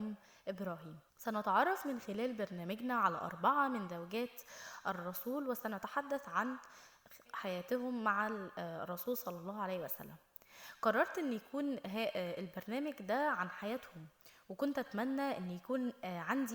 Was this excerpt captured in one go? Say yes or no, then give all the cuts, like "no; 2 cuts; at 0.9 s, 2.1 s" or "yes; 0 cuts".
no; 2 cuts; at 1.1 s, 7.2 s